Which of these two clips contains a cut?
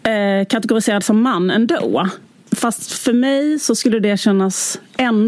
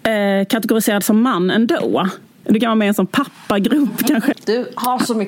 second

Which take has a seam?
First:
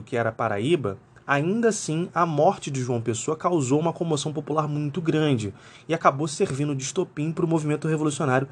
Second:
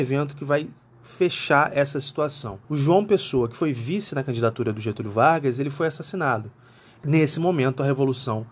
second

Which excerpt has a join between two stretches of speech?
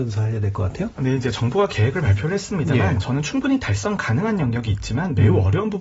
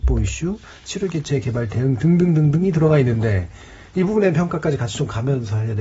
first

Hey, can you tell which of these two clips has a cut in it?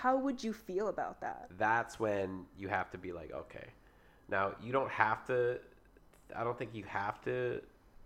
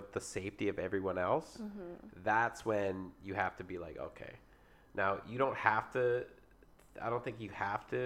first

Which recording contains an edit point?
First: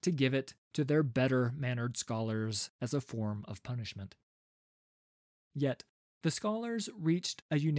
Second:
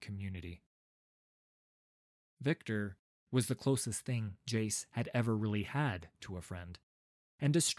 first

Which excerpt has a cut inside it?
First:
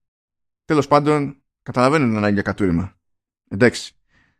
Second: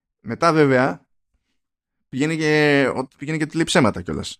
second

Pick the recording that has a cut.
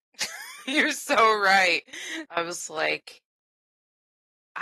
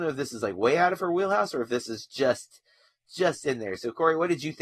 first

